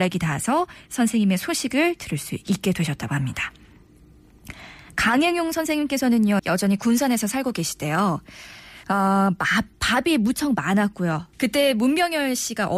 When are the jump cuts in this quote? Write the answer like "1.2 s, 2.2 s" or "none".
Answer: 6.4 s, 8.8 s, 11.3 s